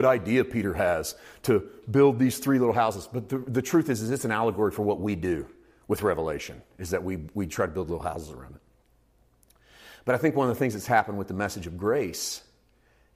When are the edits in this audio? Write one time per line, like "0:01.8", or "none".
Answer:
none